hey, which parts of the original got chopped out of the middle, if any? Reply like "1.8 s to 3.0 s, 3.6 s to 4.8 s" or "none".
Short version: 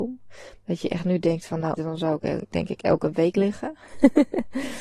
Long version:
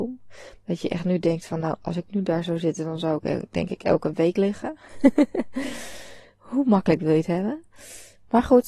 1.8 s to 2.8 s